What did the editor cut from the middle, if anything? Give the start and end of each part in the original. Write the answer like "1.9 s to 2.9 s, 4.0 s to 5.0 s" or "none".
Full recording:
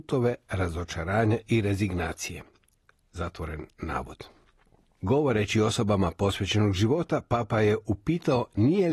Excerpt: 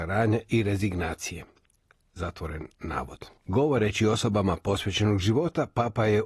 4.3 s to 4.9 s